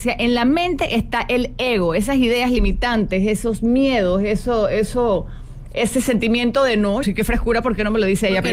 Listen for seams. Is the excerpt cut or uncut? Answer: cut